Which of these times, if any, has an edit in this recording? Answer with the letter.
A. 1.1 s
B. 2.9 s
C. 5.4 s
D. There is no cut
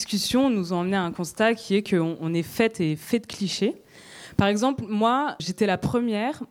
C